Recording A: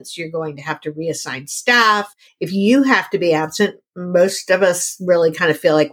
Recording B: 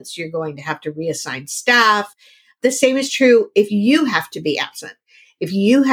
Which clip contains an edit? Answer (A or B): A